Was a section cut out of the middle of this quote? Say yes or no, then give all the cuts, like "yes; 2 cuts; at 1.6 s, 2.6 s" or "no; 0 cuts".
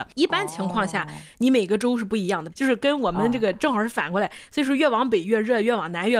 yes; 1 cut; at 2.5 s